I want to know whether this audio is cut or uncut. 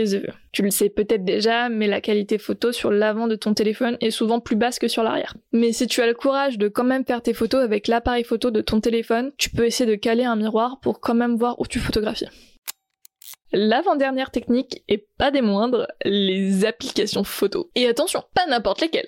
uncut